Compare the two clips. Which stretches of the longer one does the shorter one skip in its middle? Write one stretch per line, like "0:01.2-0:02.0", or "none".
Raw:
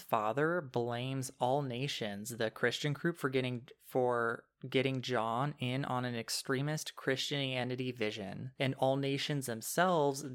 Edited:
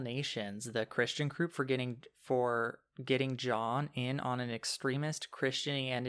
none